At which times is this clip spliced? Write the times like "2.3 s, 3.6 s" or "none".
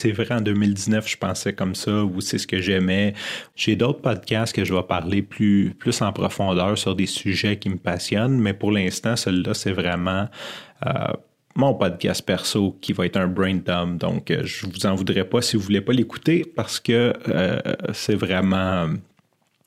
none